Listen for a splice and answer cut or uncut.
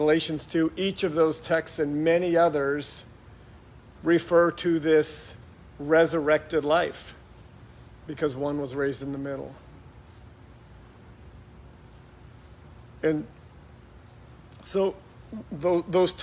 cut